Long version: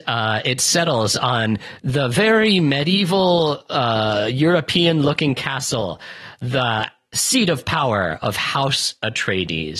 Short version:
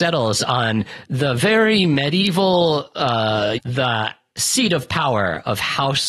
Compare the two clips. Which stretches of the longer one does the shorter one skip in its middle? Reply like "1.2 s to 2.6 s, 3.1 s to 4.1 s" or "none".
4.3 s to 6.3 s